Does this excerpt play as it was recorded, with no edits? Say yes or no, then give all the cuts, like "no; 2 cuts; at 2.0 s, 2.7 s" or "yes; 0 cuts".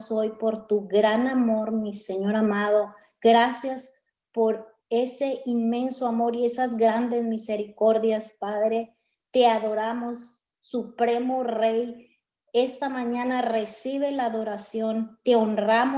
yes; 0 cuts